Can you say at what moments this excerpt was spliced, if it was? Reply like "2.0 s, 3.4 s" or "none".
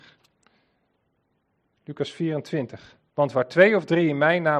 3.1 s